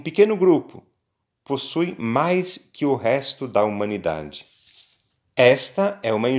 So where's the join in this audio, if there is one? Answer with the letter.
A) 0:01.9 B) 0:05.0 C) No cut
C